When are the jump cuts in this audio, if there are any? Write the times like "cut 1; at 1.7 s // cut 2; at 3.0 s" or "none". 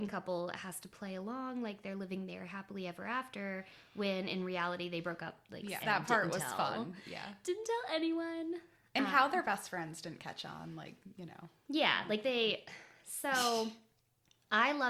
cut 1; at 5.8 s

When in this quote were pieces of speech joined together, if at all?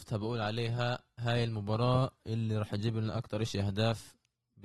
none

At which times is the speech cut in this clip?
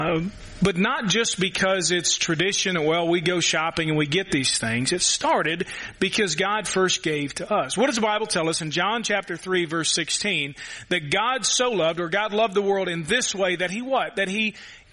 none

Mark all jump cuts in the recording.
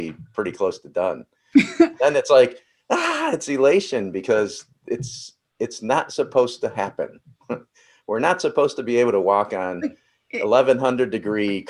none

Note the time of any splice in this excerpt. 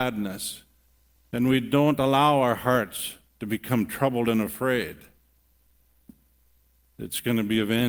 none

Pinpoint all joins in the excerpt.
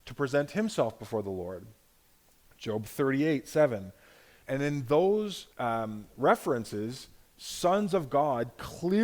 cut 1; at 4.4 s // cut 2; at 5.5 s

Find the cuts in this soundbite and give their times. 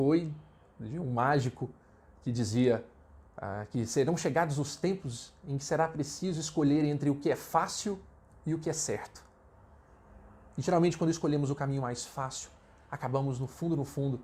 cut 1; at 10.5 s

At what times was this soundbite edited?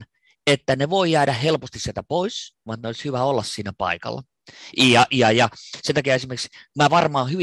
cut 1; at 2.7 s // cut 2; at 4.7 s

